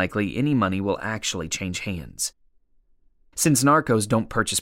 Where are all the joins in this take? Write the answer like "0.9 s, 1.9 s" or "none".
none